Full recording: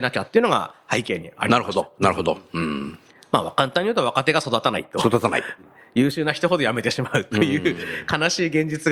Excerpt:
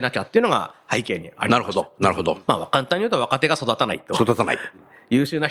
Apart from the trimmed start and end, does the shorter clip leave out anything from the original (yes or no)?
yes